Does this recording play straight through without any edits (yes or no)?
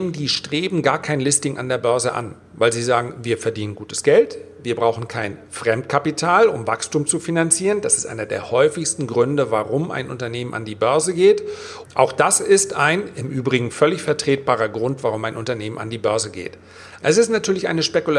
no